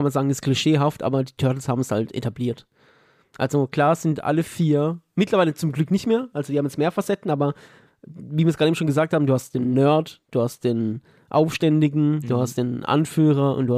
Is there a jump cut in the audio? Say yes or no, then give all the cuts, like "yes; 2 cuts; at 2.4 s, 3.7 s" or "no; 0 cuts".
no; 0 cuts